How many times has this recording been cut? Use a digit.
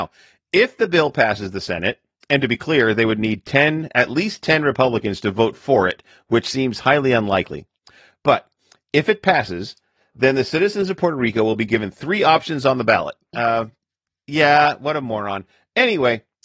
1